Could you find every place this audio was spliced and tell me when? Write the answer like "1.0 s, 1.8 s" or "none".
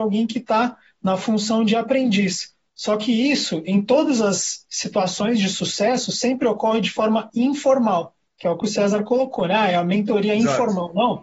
none